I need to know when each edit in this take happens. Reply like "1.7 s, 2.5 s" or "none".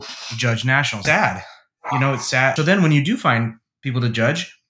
1.0 s, 2.6 s